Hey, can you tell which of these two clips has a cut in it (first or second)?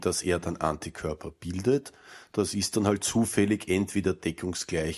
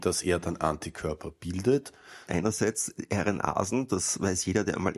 second